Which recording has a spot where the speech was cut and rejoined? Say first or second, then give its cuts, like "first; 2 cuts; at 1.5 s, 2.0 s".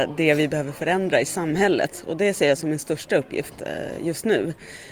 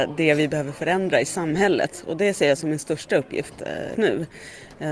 second; 1 cut; at 4.0 s